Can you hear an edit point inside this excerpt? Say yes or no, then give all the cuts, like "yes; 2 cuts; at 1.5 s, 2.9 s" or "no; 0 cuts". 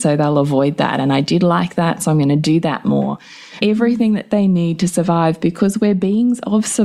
yes; 1 cut; at 3.6 s